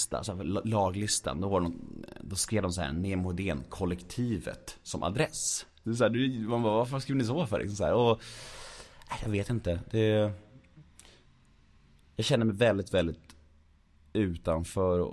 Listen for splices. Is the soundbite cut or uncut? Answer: cut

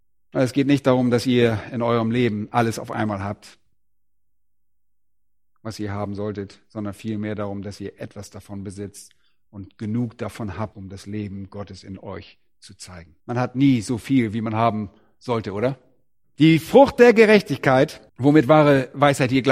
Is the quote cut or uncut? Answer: cut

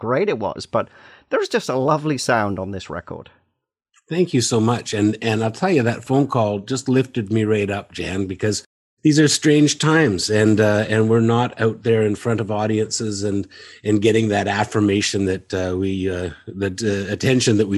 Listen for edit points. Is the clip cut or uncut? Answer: uncut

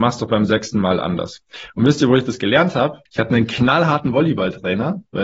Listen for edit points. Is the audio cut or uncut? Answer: cut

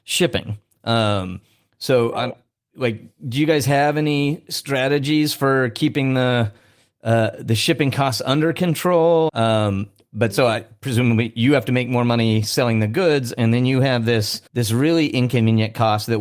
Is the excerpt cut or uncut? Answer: cut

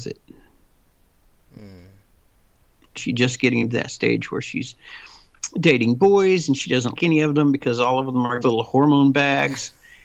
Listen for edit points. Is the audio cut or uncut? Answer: cut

